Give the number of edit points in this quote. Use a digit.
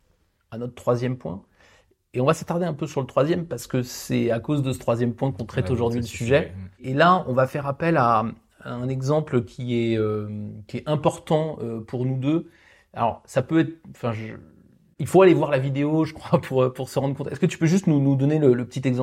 0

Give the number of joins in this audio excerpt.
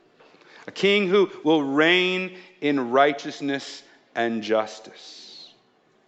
1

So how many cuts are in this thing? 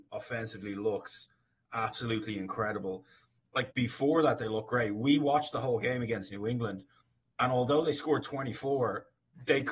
1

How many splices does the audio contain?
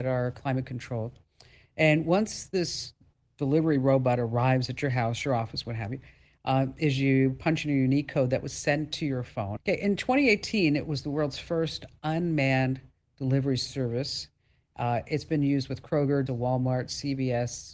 2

